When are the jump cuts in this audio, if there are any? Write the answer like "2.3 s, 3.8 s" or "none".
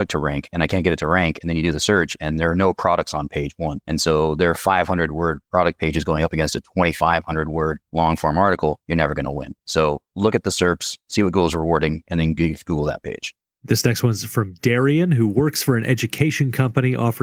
none